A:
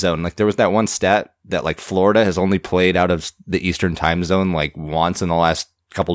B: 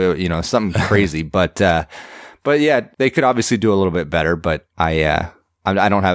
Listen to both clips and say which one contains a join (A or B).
B